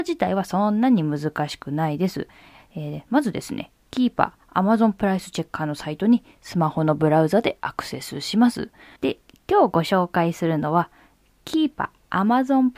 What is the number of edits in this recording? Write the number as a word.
one